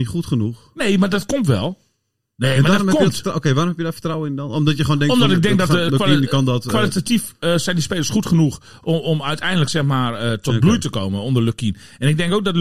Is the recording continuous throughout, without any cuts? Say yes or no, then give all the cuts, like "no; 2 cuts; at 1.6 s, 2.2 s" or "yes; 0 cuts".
yes; 0 cuts